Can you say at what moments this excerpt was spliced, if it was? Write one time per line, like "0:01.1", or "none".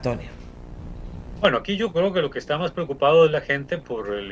none